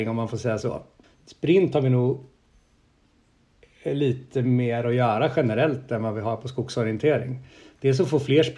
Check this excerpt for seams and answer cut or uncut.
cut